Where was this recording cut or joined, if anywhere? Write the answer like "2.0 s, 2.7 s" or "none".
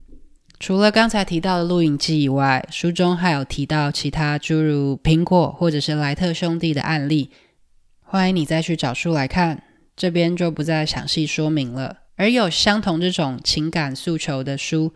12.1 s